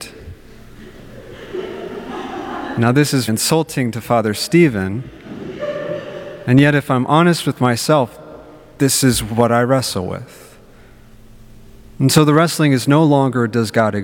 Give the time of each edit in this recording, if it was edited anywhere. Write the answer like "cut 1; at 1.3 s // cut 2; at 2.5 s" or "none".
cut 1; at 3.3 s

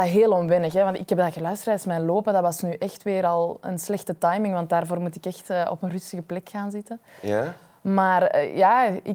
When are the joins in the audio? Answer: none

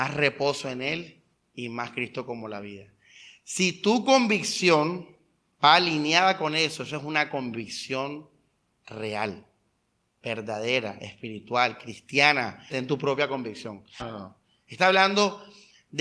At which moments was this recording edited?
cut 1; at 12.7 s // cut 2; at 14.0 s

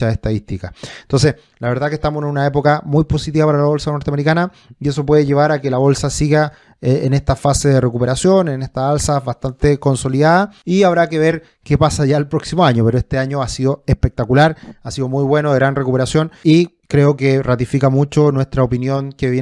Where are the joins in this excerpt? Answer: cut 1; at 16.8 s

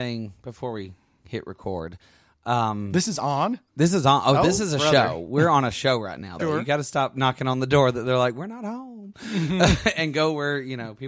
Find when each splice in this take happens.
cut 1; at 6.4 s

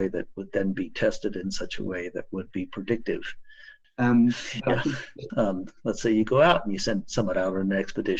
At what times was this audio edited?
cut 1; at 3.8 s // cut 2; at 5.3 s

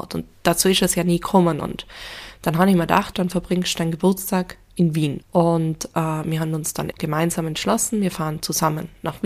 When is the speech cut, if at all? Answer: cut 1; at 3.1 s // cut 2; at 5.2 s // cut 3; at 6.9 s

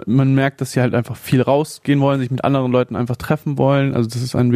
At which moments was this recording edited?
none

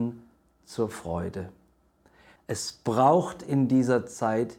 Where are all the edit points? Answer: cut 1; at 2.4 s

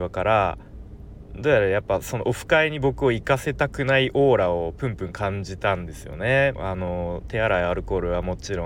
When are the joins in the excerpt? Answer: cut 1; at 6.6 s

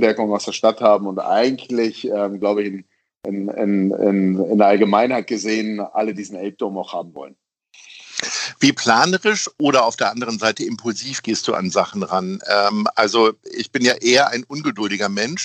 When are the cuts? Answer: none

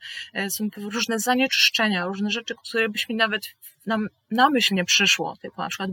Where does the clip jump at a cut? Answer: none

